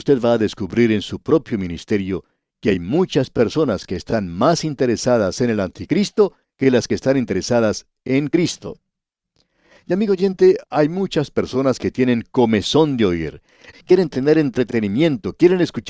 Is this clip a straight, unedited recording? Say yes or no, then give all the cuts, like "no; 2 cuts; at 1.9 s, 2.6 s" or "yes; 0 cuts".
no; 1 cut; at 13.7 s